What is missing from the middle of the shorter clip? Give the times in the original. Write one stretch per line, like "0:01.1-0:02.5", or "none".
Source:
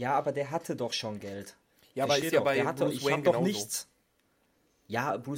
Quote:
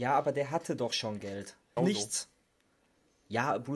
0:01.8-0:03.4